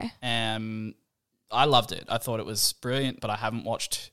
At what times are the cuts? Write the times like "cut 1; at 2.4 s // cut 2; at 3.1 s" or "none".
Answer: cut 1; at 3.2 s